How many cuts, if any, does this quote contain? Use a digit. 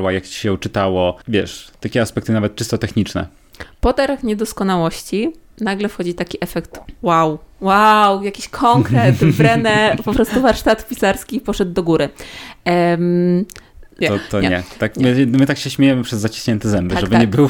2